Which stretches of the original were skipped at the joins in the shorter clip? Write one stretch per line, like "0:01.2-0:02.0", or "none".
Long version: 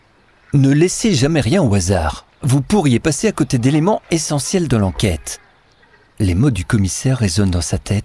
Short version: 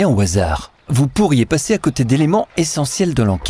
none